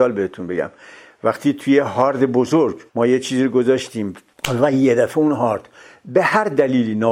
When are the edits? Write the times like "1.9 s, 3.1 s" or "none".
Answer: 2.9 s